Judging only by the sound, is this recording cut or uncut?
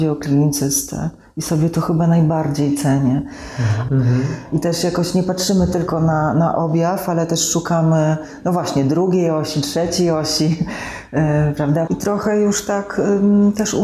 cut